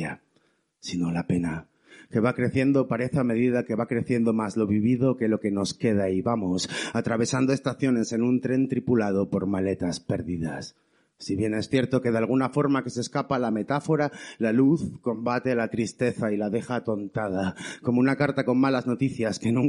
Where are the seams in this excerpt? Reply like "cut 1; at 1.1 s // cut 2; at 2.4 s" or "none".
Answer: none